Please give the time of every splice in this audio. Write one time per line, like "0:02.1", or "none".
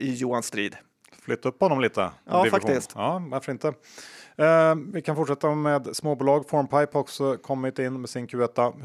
none